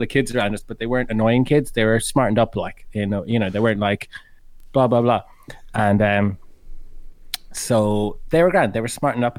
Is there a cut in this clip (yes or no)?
no